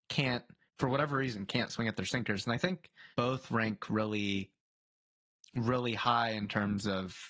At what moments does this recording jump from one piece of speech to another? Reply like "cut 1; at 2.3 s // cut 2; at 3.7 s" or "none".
cut 1; at 3.1 s